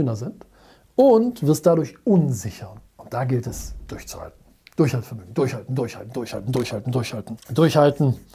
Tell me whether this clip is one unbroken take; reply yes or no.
no